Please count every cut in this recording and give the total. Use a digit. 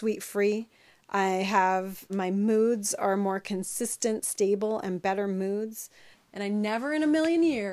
2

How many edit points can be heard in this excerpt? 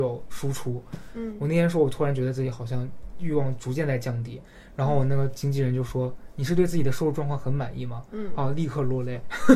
0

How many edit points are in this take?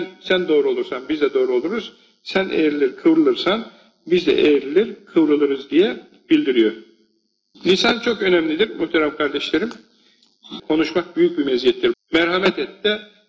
2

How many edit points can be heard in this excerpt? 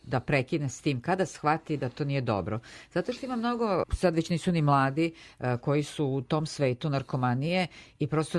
1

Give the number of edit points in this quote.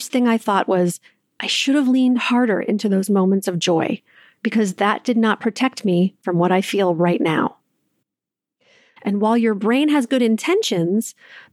1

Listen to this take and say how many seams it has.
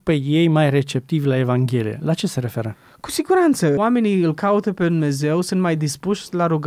0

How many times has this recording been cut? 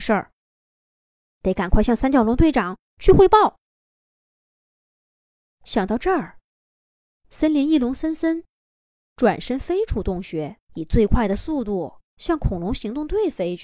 2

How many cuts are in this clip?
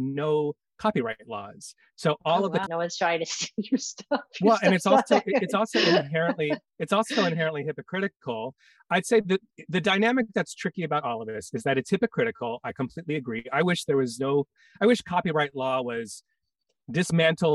1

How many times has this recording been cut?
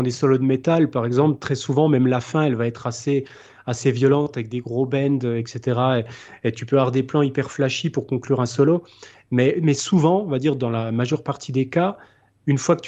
0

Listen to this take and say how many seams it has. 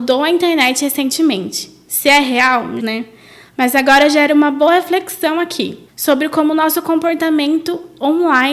2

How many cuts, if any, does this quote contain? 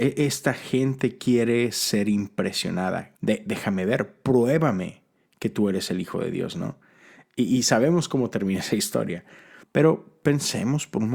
2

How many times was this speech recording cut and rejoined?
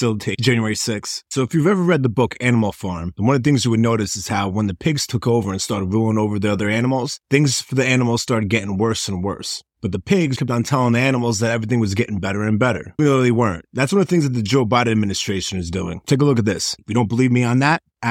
3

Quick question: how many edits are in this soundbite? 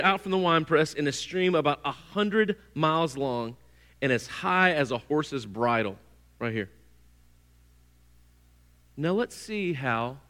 0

